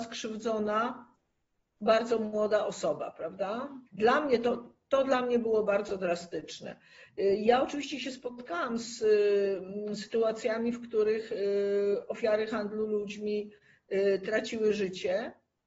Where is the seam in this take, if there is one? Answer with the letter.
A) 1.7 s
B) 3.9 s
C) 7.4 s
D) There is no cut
B